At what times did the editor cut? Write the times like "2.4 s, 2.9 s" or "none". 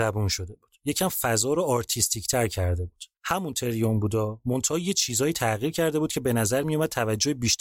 3.1 s